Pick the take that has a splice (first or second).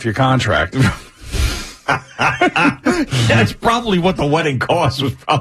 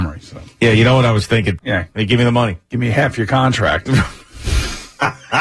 second